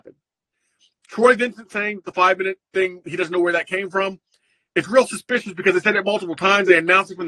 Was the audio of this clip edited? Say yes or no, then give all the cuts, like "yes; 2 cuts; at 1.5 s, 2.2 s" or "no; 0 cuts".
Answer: no; 0 cuts